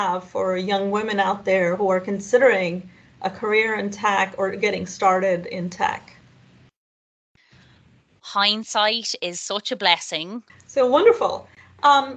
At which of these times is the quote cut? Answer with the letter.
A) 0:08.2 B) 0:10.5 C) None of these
B